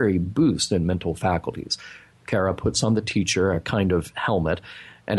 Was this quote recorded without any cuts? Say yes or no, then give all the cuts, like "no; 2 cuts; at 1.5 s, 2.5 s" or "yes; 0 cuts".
yes; 0 cuts